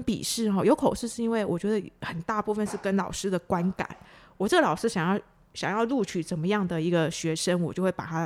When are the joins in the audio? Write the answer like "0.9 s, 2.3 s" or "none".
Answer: none